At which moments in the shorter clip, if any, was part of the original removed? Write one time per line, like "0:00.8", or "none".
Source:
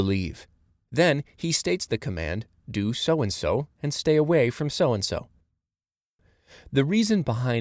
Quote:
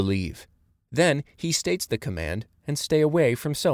0:02.6

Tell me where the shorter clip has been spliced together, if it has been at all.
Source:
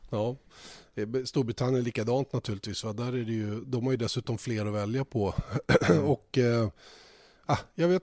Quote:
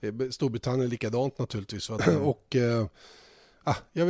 0:02.0

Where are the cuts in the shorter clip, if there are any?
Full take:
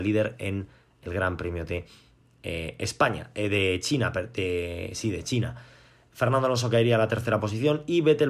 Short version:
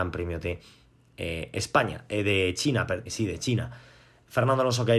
0:03.1

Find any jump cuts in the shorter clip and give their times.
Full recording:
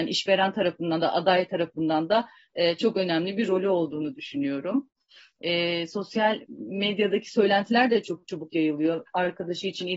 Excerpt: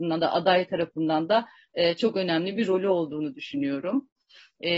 none

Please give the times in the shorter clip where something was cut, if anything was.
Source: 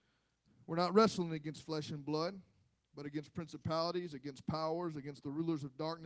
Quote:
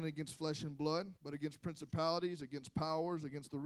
0:01.2

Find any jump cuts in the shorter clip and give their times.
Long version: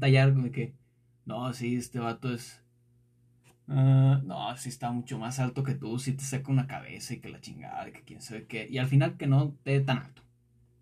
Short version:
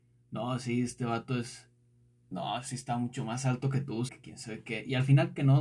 0:02.3
0:04.1

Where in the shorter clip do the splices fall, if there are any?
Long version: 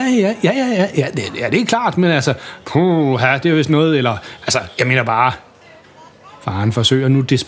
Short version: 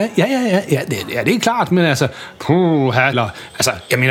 0:03.1

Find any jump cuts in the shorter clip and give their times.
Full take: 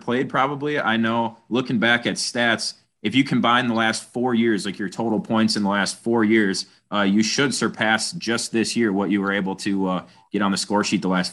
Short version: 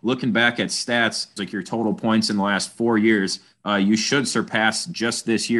0:01.4

